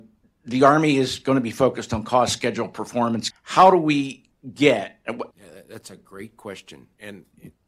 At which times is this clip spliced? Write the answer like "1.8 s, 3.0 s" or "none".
3.3 s, 5.3 s